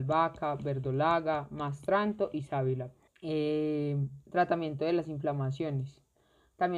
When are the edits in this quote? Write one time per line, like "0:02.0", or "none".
0:03.1